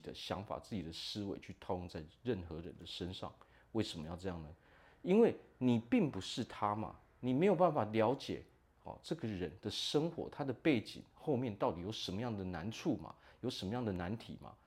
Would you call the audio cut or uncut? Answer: uncut